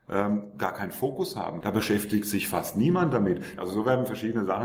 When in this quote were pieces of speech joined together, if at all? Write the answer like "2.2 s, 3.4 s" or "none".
1.6 s, 3.6 s